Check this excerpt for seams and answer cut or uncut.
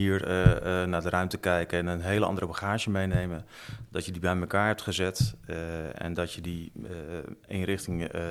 uncut